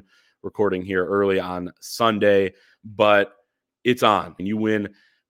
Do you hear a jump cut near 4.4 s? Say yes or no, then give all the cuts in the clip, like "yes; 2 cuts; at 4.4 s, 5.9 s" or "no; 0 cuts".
yes; 1 cut; at 4.4 s